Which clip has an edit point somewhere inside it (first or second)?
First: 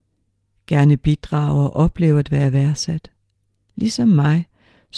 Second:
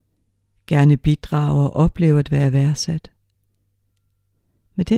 first